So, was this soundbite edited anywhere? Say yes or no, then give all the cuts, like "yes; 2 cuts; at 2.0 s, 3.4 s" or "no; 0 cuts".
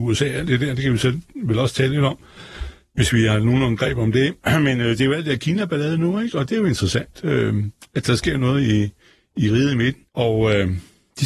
yes; 1 cut; at 10.1 s